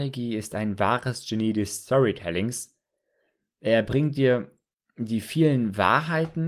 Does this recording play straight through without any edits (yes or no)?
yes